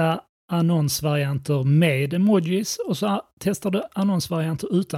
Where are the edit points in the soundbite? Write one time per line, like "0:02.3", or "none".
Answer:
none